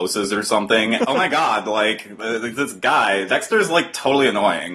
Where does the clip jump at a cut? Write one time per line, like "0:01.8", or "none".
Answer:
0:01.0
0:03.3